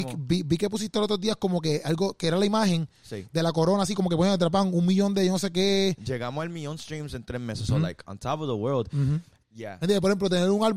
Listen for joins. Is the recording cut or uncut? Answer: cut